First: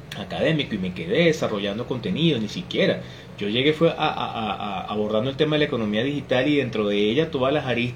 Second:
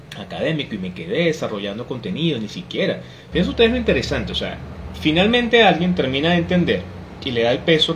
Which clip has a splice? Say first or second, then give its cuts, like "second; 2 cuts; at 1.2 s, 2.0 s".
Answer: second; 1 cut; at 3.3 s